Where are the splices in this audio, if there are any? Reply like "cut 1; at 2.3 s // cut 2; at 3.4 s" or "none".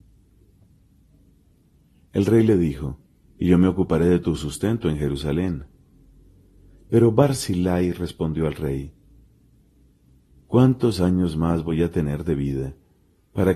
cut 1; at 3.2 s